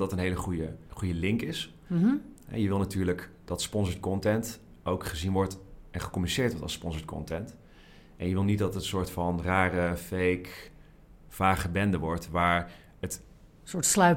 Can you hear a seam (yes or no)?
no